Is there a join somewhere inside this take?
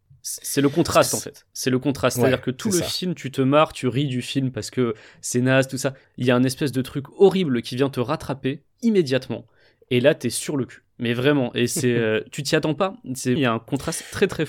yes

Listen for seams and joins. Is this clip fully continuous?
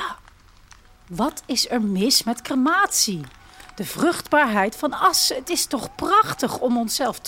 yes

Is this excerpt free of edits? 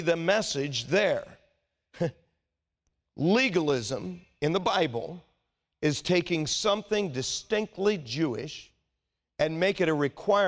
yes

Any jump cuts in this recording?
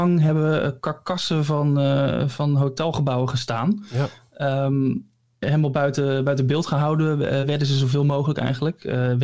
no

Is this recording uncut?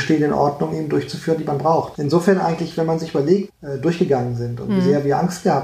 no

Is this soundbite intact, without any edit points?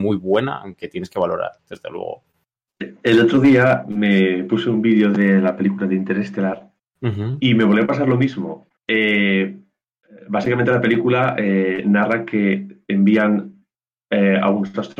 no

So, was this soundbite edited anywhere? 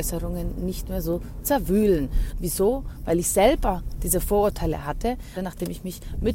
yes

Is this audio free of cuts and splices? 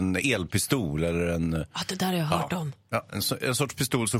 yes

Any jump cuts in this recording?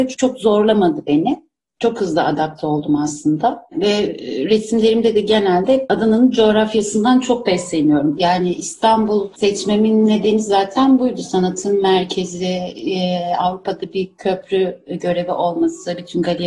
yes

